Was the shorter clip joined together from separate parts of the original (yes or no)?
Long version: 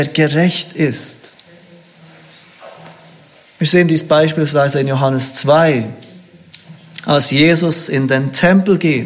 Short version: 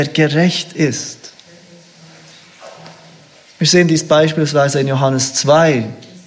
no